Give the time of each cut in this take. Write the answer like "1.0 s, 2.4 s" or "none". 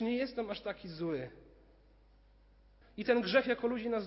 2.8 s